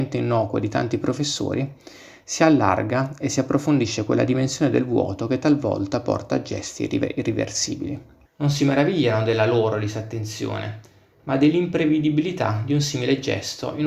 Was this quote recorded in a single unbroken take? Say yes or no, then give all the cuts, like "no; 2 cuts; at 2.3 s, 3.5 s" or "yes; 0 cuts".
no; 1 cut; at 8.2 s